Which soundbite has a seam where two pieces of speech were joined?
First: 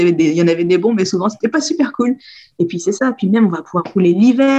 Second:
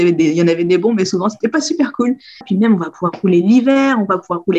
second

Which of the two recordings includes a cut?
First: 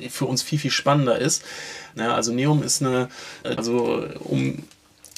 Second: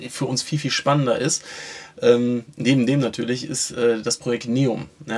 first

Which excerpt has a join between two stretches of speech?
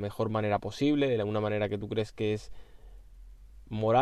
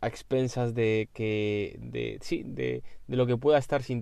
second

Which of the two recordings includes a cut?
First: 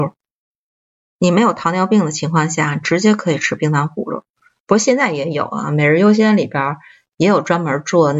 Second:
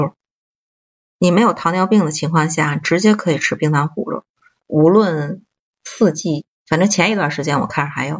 second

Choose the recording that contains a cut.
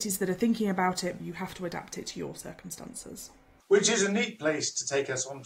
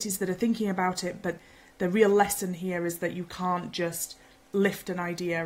first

